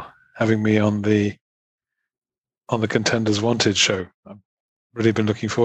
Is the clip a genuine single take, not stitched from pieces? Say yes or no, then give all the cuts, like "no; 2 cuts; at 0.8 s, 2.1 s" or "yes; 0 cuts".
yes; 0 cuts